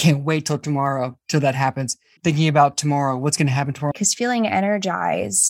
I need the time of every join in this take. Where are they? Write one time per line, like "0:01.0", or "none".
0:02.2
0:03.9

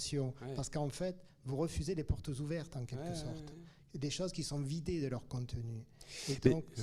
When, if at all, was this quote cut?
none

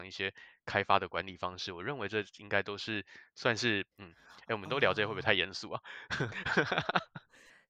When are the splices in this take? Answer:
0:03.9
0:06.3

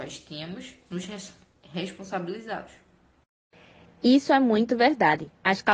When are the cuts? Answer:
none

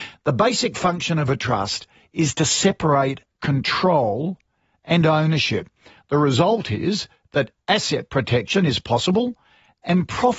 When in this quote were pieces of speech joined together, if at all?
none

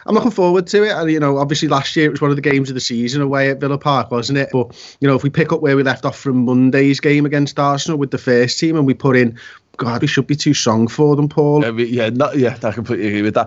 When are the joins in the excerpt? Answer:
0:04.5
0:10.0
0:11.6

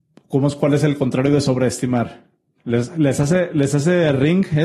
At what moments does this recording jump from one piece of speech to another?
0:02.6

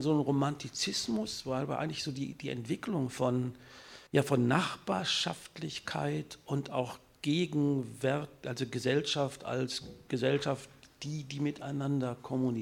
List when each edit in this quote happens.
0:04.1

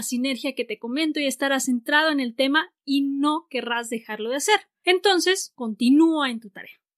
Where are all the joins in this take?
0:05.5

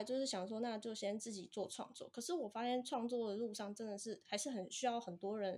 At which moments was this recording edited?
none

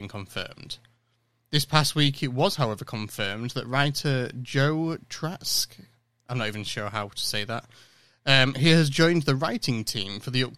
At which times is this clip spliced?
none

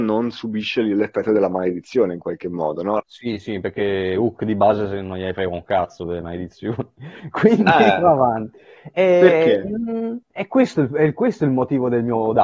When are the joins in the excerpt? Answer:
0:03.0
0:10.2

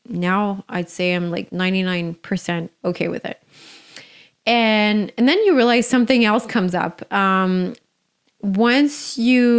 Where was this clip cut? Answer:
none

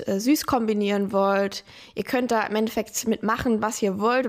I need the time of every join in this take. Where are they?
none

